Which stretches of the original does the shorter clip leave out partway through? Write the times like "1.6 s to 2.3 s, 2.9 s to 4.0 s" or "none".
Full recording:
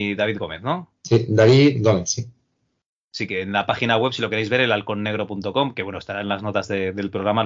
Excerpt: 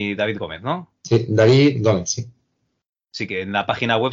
none